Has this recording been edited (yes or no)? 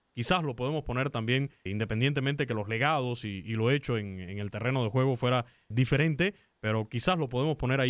yes